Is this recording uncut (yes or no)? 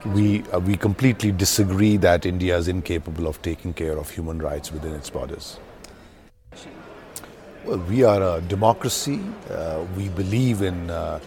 yes